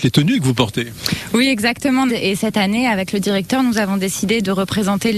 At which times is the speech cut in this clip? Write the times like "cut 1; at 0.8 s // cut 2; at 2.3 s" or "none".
cut 1; at 2.1 s

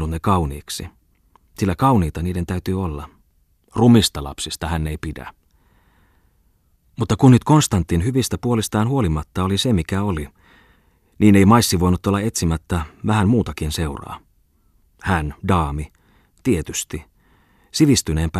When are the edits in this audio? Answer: none

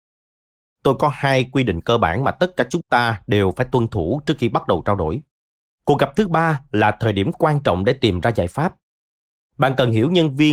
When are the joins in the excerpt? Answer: cut 1; at 5.7 s

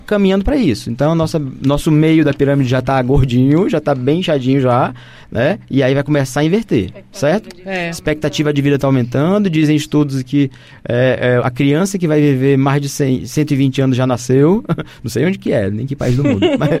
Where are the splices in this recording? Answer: cut 1; at 11.4 s

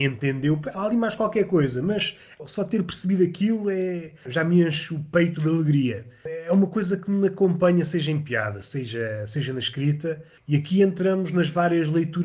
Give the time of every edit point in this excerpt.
cut 1; at 10.4 s

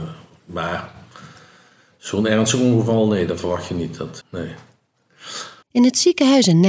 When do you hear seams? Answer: cut 1; at 4.2 s // cut 2; at 5.6 s

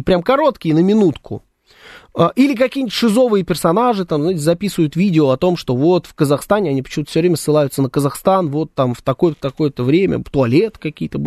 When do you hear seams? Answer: none

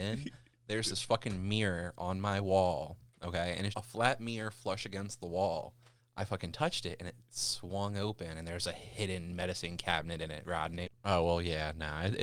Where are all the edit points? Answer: cut 1; at 3.7 s // cut 2; at 6.0 s // cut 3; at 10.8 s

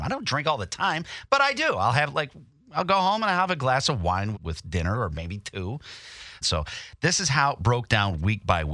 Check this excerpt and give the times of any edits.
cut 1; at 4.3 s // cut 2; at 6.4 s

